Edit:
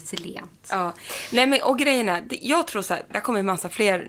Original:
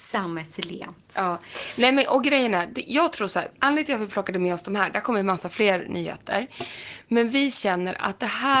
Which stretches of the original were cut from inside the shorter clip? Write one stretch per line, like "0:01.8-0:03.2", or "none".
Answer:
0:03.6-0:04.9